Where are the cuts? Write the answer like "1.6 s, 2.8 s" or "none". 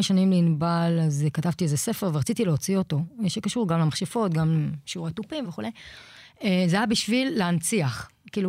5.4 s

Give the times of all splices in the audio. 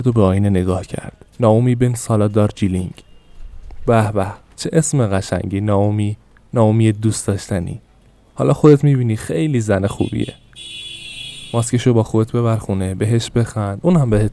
1.3 s

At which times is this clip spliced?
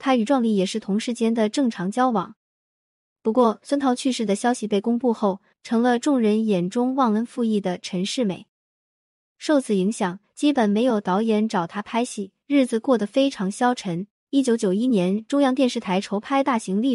5.5 s, 14.2 s

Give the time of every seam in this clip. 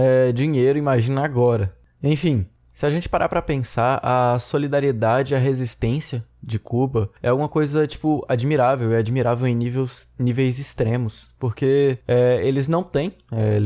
none

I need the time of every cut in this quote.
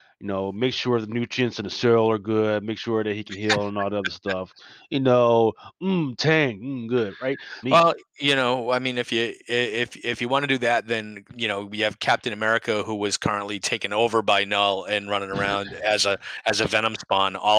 7.6 s

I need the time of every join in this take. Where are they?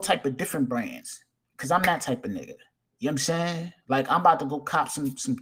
none

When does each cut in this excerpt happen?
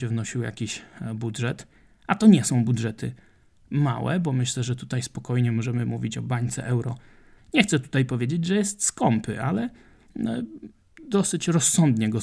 7.4 s

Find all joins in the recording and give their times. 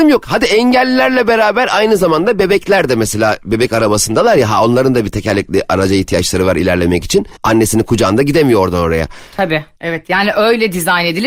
7.4 s, 9.8 s

